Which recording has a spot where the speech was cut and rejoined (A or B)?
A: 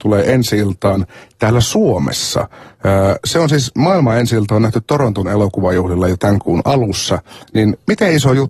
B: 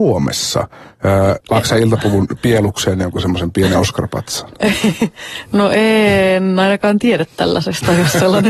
B